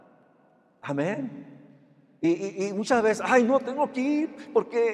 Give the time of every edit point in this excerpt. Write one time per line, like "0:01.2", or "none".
none